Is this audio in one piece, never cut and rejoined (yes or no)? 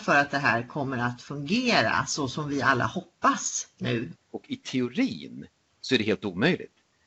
no